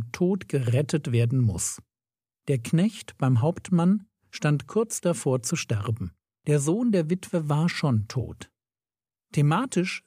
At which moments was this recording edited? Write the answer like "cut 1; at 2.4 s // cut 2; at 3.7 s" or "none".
none